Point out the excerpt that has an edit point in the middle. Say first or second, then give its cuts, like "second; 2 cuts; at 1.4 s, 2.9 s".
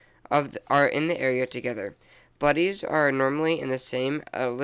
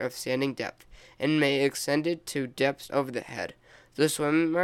second; 1 cut; at 2.9 s